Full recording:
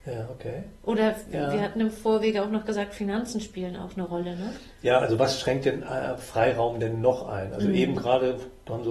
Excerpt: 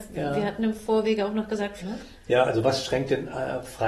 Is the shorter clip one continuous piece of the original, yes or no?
no